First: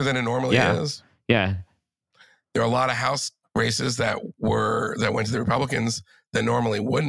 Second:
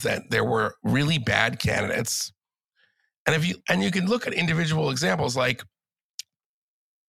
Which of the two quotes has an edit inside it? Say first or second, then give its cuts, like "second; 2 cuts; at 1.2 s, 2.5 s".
second; 1 cut; at 3.6 s